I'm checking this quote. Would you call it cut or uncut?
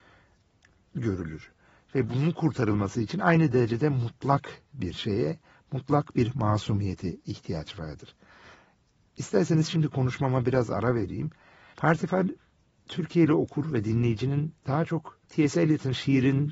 cut